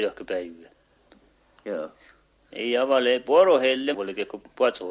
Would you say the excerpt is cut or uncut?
cut